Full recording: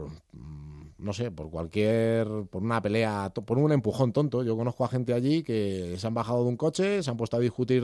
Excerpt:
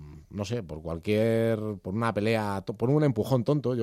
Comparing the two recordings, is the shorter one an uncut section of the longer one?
yes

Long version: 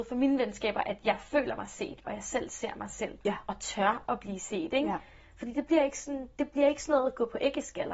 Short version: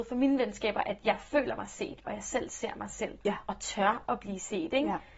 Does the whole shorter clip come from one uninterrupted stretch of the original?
yes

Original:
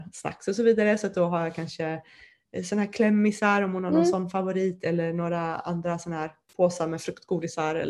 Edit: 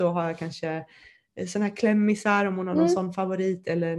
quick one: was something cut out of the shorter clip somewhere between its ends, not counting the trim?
no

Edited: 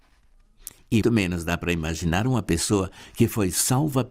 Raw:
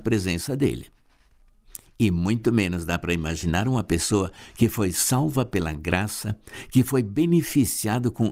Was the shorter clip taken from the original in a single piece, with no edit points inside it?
no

